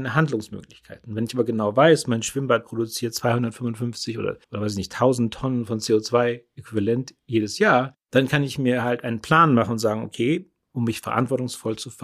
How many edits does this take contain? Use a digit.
1